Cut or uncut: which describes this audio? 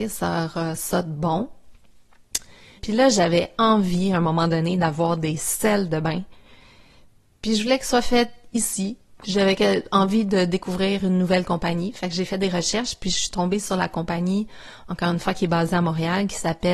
cut